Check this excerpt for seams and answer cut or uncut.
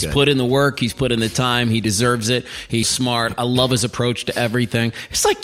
cut